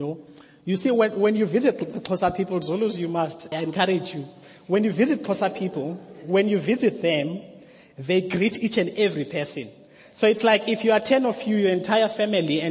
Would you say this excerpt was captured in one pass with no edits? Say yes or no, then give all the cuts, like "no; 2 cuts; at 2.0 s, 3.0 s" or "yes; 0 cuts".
no; 1 cut; at 3.5 s